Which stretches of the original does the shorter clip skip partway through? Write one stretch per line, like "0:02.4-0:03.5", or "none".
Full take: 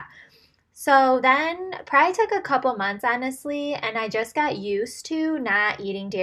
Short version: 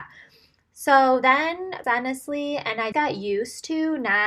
0:01.8-0:03.0
0:04.1-0:04.3